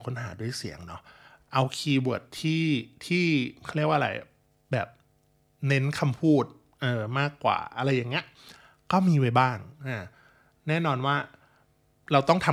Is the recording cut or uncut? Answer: uncut